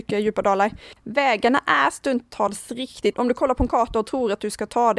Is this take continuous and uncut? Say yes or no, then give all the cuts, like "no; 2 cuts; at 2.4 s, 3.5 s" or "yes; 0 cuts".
no; 2 cuts; at 1.0 s, 3.1 s